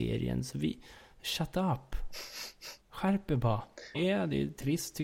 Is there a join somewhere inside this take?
yes; 2 cuts; at 2.8 s, 3.9 s

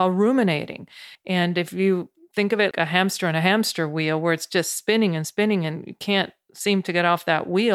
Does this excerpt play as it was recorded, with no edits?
no; 2 cuts; at 1.2 s, 2.7 s

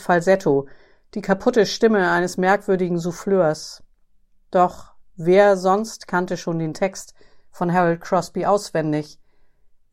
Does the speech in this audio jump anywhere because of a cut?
no; 0 cuts

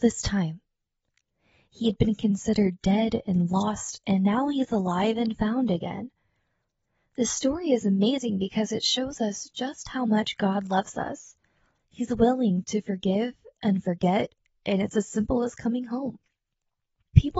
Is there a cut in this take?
no; 0 cuts

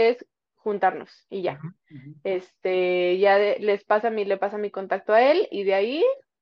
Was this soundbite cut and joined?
no; 0 cuts

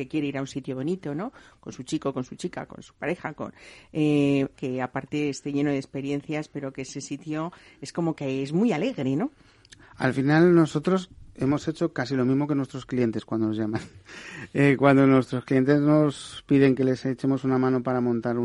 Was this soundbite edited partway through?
yes; 1 cut; at 4.5 s

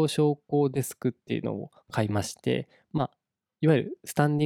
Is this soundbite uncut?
yes; 0 cuts

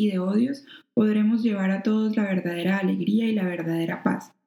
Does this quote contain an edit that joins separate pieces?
no; 0 cuts

